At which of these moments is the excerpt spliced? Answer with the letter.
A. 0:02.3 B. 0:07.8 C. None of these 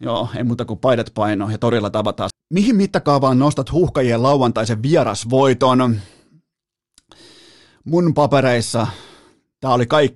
A